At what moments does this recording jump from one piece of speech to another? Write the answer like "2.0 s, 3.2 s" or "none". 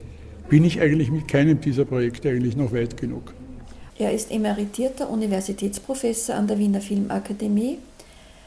3.9 s